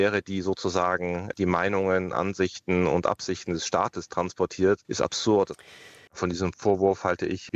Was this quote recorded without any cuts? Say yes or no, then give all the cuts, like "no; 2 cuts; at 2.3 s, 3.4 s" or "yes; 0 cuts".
no; 1 cut; at 6.1 s